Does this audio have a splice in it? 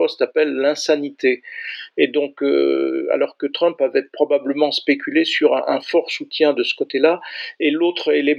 no; 0 cuts

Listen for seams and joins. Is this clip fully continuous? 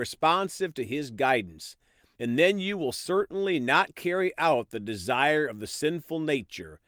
yes; 0 cuts

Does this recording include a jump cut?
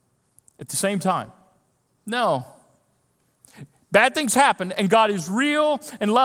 yes; 1 cut; at 2.0 s

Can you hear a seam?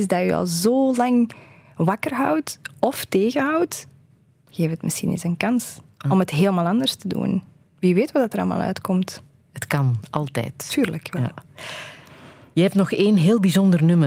no; 0 cuts

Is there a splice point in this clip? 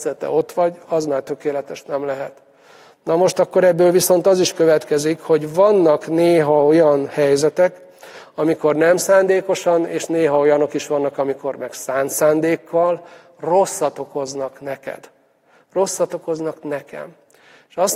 no; 0 cuts

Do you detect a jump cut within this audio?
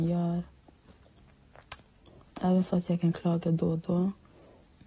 yes; 1 cut; at 2.3 s

